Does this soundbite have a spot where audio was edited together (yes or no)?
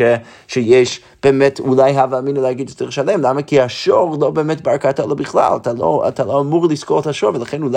no